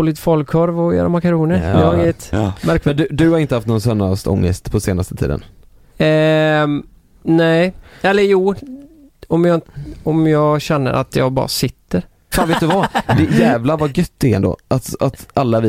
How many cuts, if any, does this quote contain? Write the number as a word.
one